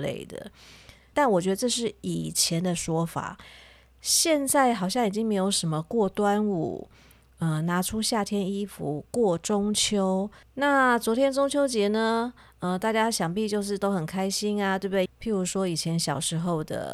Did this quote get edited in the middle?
yes; 3 cuts; at 1.1 s, 10.4 s, 15.1 s

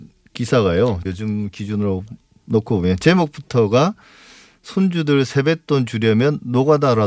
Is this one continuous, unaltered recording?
no; 1 cut; at 1.0 s

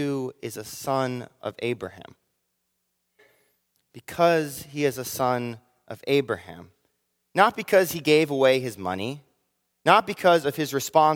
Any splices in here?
no; 0 cuts

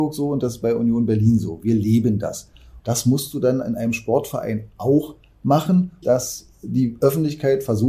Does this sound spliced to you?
yes; 2 cuts; at 2.8 s, 6.0 s

